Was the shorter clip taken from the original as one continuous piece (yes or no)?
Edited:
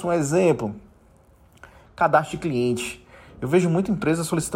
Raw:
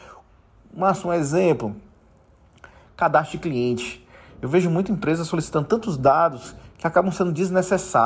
yes